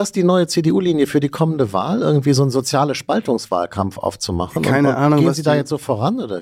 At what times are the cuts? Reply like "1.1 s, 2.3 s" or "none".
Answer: none